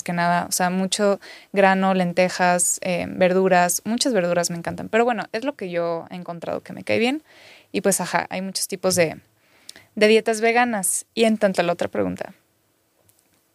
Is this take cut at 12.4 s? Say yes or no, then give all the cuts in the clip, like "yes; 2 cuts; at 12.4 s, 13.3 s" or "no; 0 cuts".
no; 0 cuts